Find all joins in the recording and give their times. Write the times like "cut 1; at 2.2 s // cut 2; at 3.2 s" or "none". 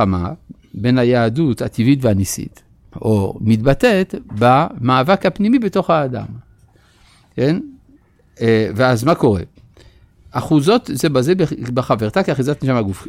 cut 1; at 2.9 s